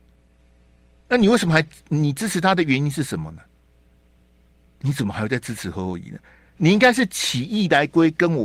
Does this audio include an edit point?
yes; 1 cut; at 4.7 s

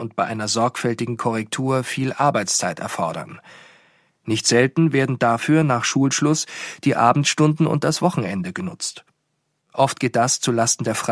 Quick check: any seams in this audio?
no; 0 cuts

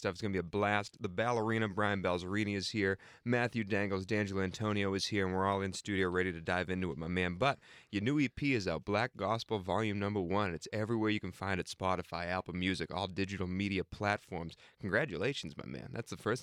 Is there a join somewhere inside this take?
no; 0 cuts

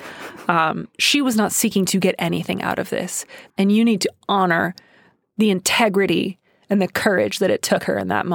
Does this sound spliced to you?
yes; 2 cuts; at 0.9 s, 3.5 s

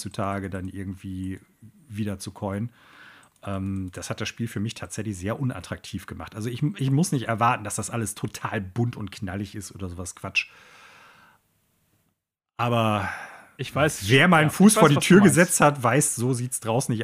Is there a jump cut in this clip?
no; 0 cuts

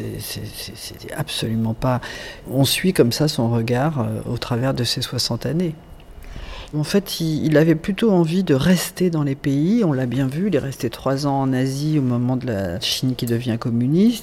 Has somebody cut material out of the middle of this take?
yes; 3 cuts; at 2.4 s, 6.7 s, 12.8 s

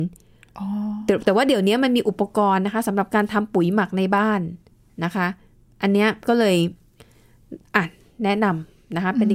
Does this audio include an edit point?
no; 0 cuts

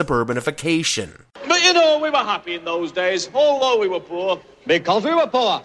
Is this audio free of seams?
yes; 0 cuts

